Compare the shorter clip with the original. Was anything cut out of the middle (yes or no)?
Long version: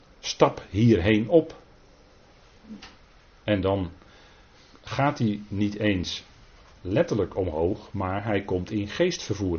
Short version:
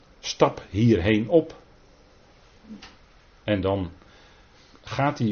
no